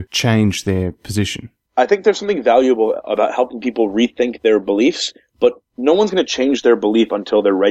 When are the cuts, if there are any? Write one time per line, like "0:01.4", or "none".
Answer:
none